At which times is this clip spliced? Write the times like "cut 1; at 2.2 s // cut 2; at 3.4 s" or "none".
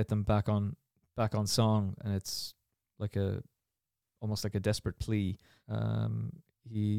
cut 1; at 5.6 s